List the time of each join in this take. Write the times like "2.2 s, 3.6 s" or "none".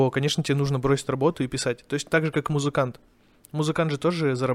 none